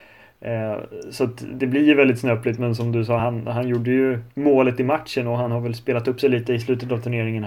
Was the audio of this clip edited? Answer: no; 0 cuts

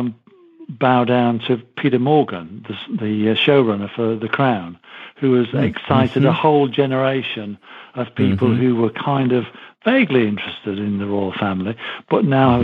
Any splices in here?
no; 0 cuts

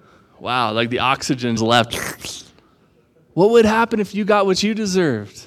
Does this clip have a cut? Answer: yes; 1 cut; at 1.6 s

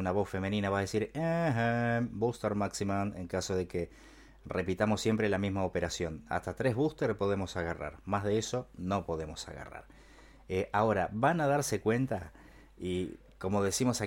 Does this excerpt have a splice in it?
no; 0 cuts

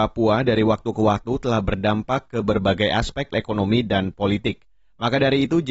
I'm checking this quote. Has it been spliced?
yes; 1 cut; at 3.3 s

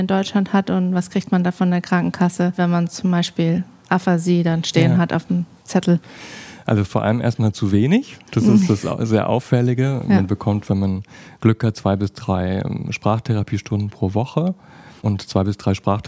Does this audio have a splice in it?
no; 0 cuts

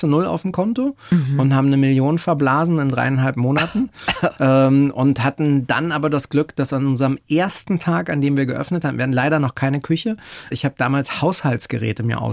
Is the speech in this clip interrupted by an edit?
no; 0 cuts

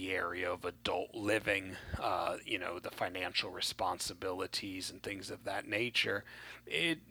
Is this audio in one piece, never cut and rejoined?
yes; 0 cuts

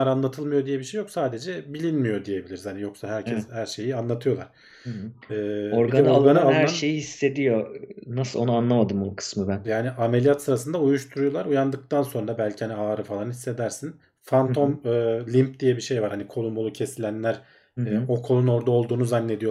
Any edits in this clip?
yes; 1 cut; at 5.2 s

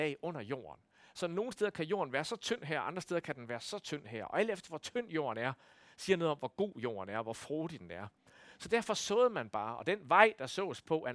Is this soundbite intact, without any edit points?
yes; 0 cuts

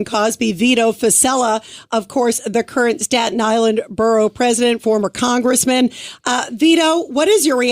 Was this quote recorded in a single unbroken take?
yes; 0 cuts

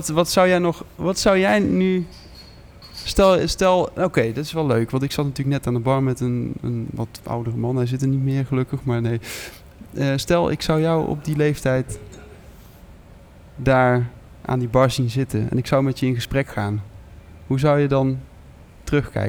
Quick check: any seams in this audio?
no; 0 cuts

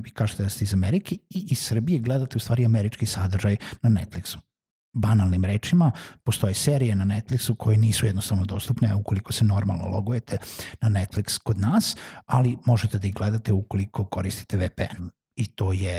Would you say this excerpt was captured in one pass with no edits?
no; 1 cut; at 15.0 s

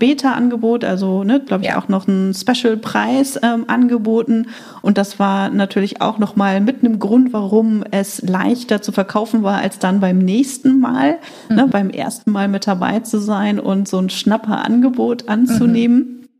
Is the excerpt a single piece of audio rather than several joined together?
no; 2 cuts; at 1.5 s, 11.7 s

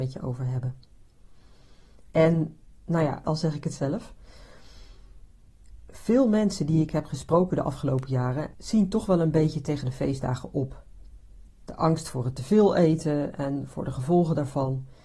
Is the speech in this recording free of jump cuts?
no; 3 cuts; at 3.2 s, 8.5 s, 11.5 s

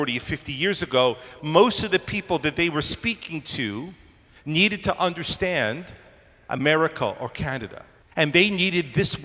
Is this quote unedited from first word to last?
no; 2 cuts; at 1.4 s, 8.0 s

